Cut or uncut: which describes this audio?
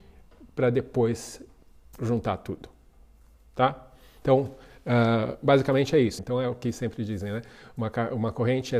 cut